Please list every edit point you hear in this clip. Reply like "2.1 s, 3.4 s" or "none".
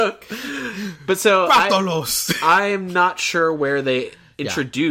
none